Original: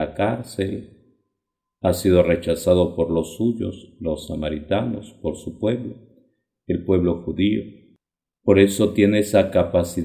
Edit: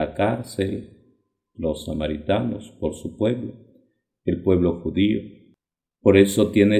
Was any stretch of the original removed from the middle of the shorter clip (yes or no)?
yes